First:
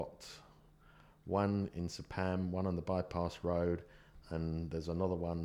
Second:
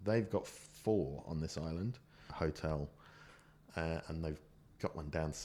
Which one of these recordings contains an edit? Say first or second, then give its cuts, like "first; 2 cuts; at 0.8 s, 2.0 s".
second; 1 cut; at 2.3 s